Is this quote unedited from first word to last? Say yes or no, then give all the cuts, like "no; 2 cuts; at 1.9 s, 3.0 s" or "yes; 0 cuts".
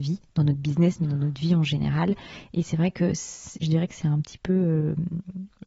yes; 0 cuts